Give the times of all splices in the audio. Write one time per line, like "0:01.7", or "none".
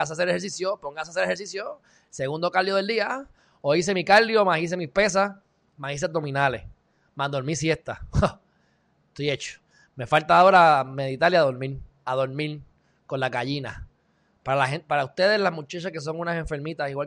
0:14.4